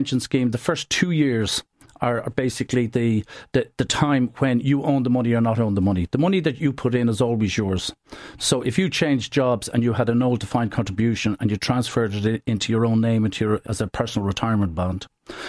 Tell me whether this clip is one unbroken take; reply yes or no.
no